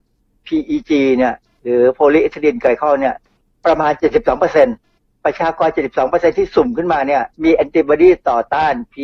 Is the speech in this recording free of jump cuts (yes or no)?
no